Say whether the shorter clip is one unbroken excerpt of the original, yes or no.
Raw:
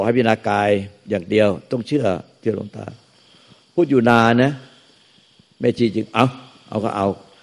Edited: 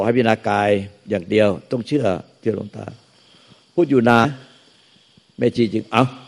no